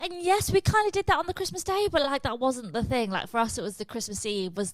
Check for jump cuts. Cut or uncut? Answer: uncut